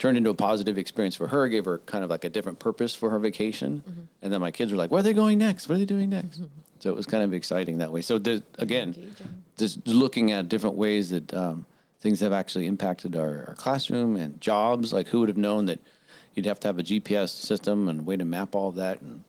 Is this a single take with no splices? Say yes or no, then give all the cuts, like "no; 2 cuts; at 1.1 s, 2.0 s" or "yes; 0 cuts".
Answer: yes; 0 cuts